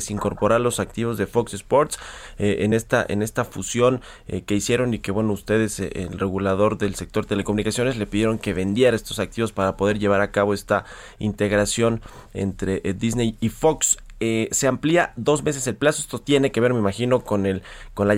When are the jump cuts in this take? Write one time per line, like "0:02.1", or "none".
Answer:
none